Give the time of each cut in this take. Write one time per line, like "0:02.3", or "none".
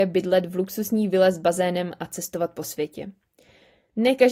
none